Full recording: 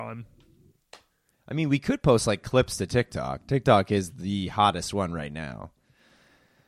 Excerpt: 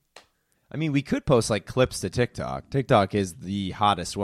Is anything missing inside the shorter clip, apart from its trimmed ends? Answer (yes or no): no